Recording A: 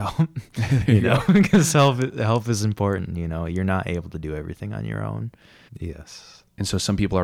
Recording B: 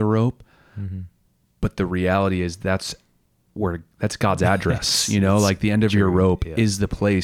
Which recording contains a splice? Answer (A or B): A